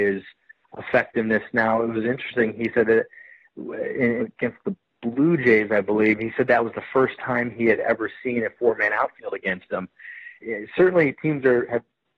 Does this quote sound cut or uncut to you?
cut